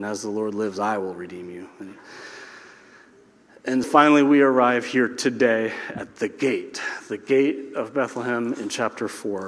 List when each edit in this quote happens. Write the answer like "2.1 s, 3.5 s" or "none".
3.8 s